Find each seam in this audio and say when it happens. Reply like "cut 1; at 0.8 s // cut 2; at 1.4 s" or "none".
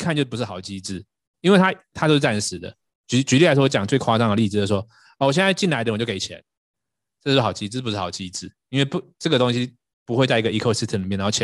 none